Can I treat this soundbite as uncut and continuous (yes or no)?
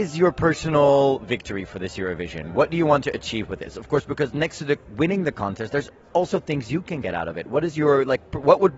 yes